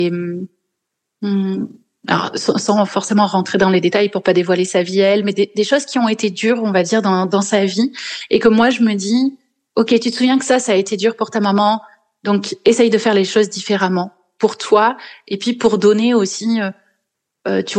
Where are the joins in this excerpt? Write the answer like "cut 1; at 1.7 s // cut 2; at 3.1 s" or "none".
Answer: none